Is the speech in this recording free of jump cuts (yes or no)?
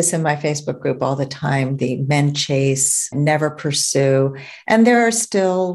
no